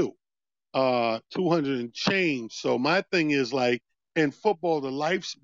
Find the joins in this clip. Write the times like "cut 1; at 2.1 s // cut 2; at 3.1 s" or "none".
none

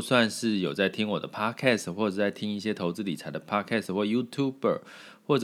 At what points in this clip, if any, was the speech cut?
none

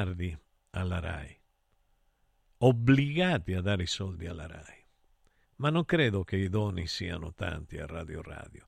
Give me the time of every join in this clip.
cut 1; at 5.4 s

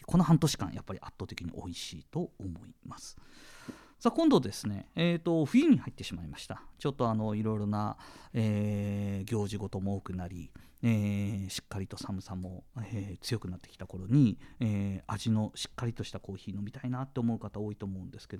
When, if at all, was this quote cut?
cut 1; at 12.7 s

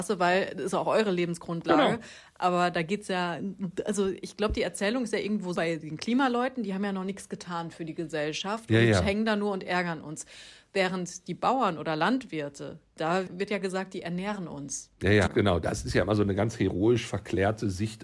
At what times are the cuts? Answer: cut 1; at 5.5 s // cut 2; at 15.3 s

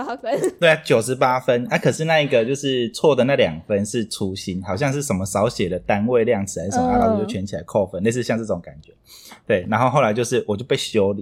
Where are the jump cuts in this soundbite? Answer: none

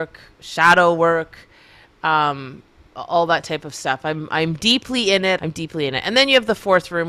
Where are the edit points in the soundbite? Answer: cut 1; at 2.9 s // cut 2; at 5.4 s

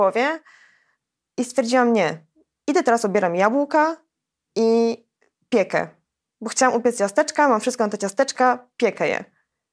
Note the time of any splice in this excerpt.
none

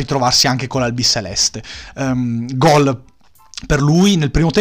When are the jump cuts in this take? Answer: none

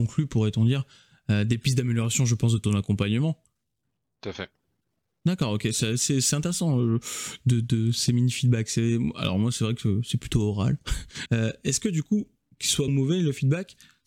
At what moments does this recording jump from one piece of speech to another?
cut 1; at 11.3 s // cut 2; at 12.9 s

